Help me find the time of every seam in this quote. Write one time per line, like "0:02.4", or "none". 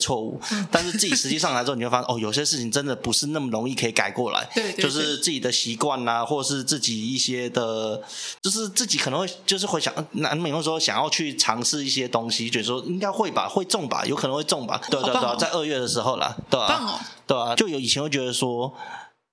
0:08.4
0:14.9
0:17.6